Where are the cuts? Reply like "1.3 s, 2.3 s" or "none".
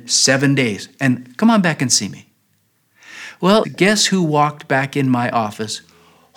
3.6 s

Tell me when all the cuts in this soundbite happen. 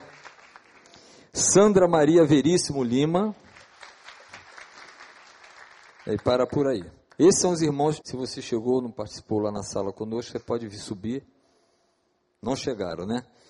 8.0 s

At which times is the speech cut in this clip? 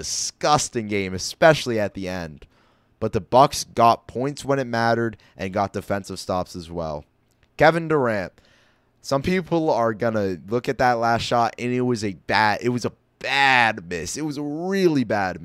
none

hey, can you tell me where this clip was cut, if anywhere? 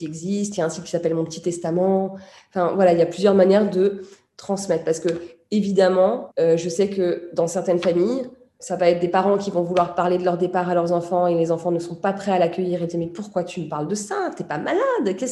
6.3 s, 8.6 s

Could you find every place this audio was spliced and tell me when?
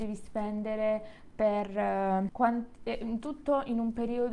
2.3 s

